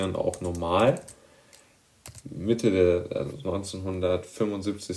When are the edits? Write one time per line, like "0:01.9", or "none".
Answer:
0:02.2